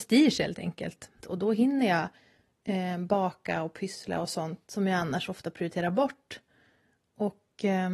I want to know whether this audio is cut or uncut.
cut